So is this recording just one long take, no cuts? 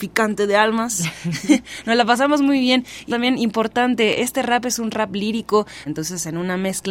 no; 3 cuts; at 3.1 s, 4.2 s, 5.9 s

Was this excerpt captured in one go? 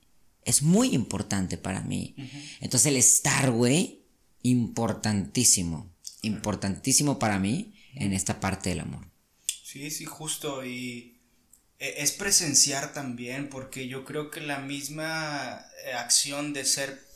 yes; 0 cuts

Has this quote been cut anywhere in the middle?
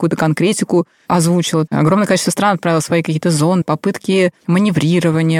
yes; 2 cuts; at 1.7 s, 3.6 s

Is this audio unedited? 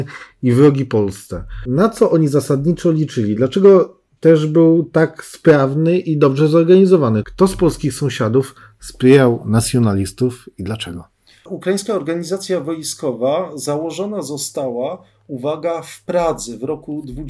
no; 1 cut; at 7.2 s

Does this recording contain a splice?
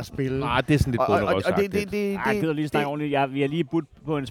no; 0 cuts

